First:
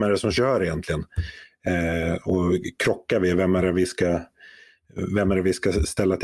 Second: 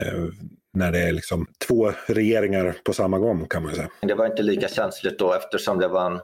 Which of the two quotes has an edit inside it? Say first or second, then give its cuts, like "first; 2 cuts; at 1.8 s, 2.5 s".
second; 1 cut; at 4.0 s